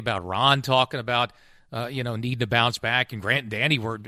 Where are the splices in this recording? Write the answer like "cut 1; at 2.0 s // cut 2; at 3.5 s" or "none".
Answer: none